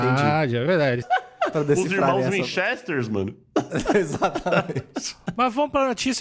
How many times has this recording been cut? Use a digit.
1